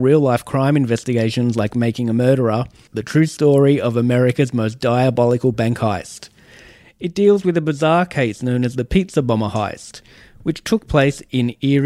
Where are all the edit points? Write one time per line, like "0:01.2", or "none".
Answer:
0:02.9